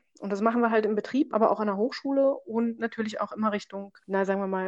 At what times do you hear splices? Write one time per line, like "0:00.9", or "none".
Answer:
0:01.3